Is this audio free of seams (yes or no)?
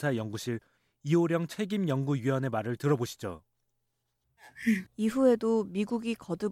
no